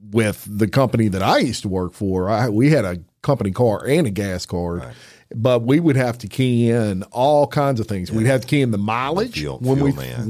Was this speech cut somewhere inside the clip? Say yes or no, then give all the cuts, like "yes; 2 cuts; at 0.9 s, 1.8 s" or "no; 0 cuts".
no; 0 cuts